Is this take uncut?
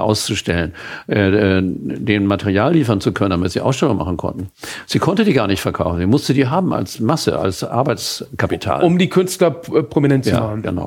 yes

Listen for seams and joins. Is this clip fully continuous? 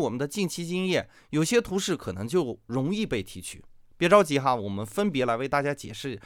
yes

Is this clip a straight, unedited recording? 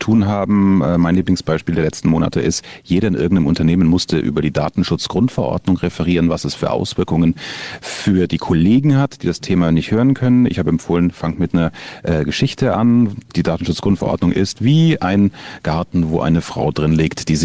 yes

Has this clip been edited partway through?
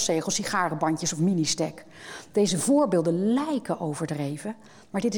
no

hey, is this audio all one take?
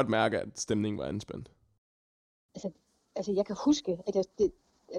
yes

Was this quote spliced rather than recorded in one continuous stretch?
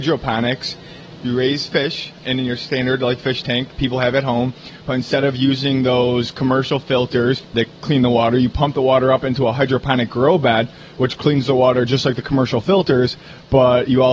yes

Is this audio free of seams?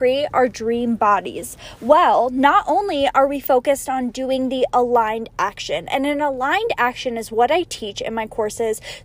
yes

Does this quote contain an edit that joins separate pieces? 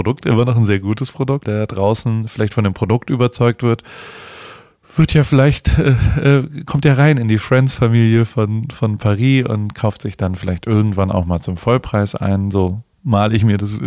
yes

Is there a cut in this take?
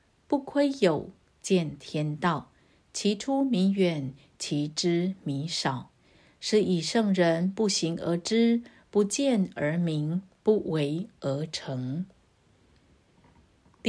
no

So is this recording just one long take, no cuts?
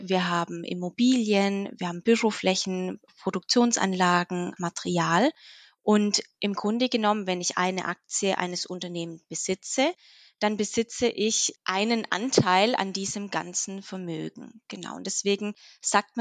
no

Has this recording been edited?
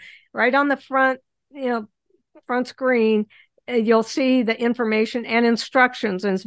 no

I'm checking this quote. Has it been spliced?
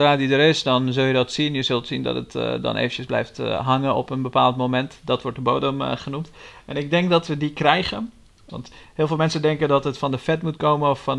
yes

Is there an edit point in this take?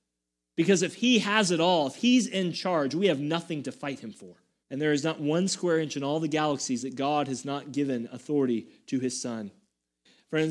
yes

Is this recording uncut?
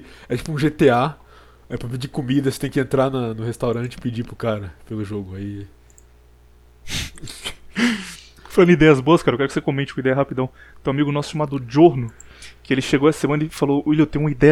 yes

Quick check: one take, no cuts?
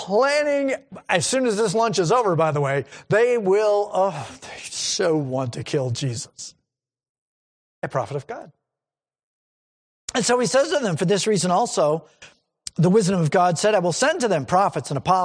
yes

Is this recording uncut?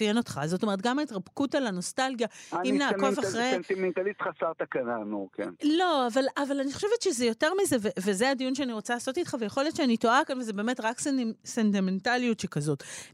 yes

